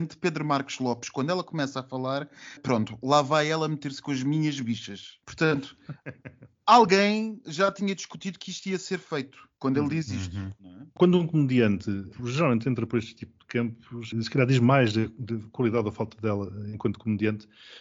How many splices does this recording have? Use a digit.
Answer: 1